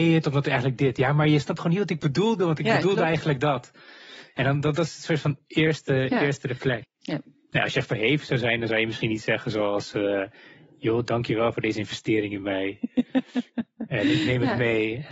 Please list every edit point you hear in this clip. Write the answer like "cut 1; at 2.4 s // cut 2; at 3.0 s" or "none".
cut 1; at 6.8 s